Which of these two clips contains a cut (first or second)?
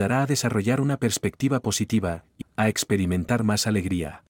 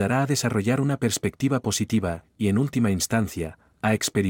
first